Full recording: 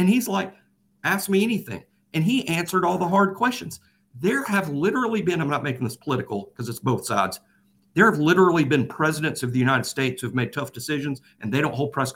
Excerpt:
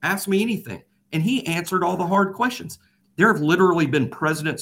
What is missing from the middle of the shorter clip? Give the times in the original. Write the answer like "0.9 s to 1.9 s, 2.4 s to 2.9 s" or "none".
4.0 s to 7.8 s